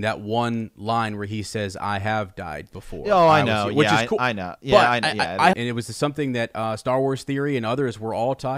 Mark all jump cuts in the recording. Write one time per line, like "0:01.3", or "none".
0:05.5

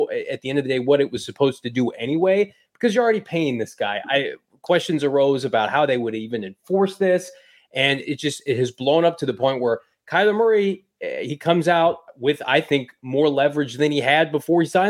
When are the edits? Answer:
0:08.0

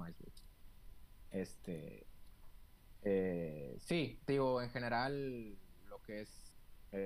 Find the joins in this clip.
0:01.3

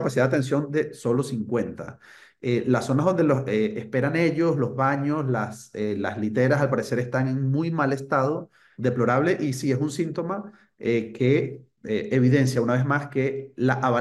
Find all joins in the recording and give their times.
0:08.7

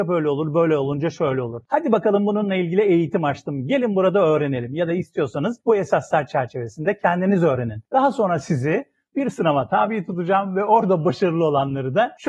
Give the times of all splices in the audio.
none

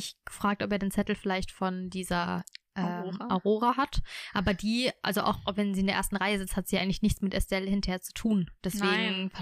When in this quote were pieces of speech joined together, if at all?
none

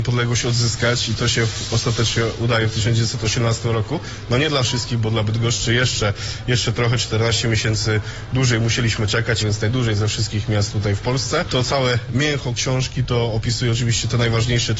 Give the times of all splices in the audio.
0:09.4

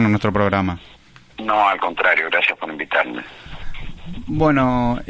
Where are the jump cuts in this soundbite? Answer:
none

